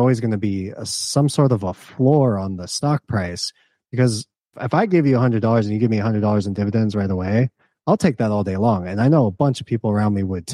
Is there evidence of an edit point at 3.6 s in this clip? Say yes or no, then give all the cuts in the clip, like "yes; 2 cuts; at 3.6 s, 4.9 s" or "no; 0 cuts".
no; 0 cuts